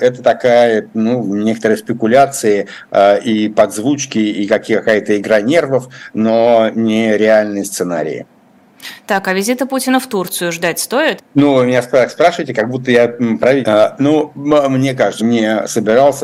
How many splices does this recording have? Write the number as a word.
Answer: three